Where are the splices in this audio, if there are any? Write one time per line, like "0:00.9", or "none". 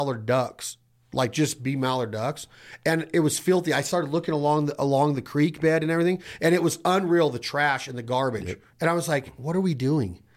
0:08.7